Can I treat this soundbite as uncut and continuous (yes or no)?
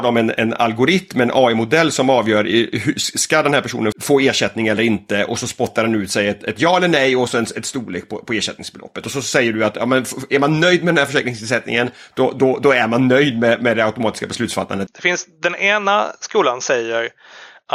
no